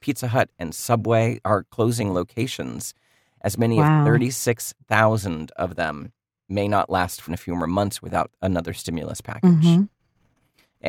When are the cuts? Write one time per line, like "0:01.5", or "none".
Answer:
0:07.3